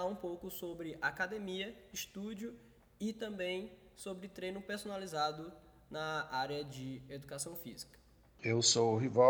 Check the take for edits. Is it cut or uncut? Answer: cut